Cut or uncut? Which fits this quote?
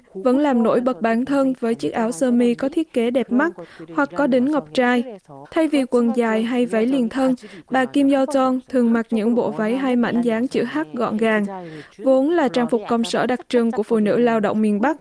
cut